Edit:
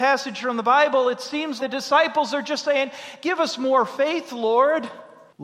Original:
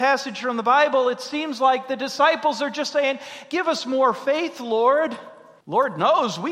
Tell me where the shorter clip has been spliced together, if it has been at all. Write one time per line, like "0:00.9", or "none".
0:01.6

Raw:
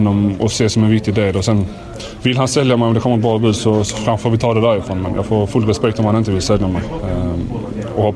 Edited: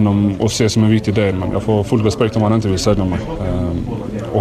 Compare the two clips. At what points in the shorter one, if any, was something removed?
0:01.3

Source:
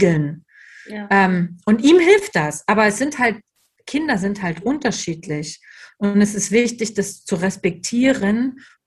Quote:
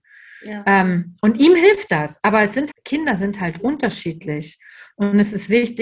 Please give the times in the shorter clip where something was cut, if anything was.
0:02.7

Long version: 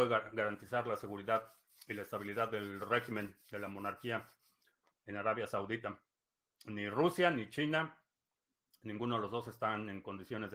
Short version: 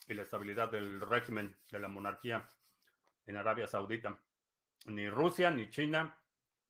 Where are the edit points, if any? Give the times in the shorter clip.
none

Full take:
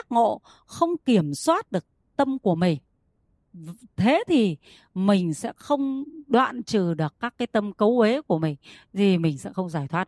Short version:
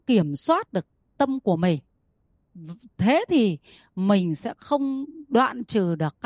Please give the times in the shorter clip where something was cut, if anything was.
none

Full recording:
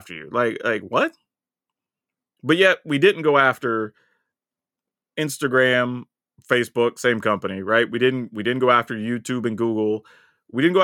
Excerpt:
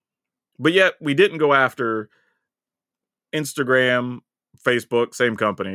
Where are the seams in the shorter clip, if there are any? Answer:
none

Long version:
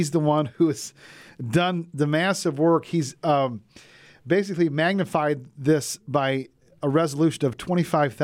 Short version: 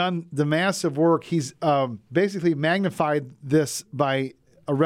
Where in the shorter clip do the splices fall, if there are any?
0:02.1

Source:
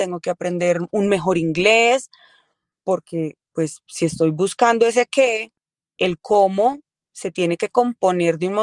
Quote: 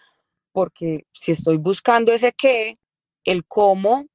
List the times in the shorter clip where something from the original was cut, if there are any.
0:01.1

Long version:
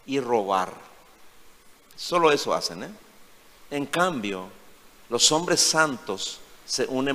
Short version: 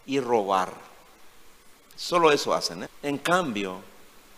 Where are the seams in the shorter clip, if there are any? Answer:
0:02.9

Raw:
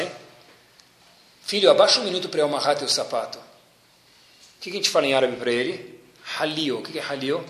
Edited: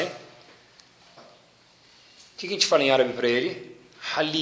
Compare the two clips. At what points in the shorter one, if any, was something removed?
0:01.2

